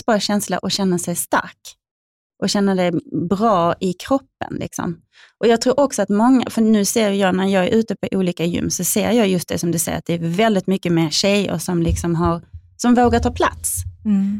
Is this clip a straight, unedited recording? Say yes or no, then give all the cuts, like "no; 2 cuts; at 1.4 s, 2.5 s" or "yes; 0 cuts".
yes; 0 cuts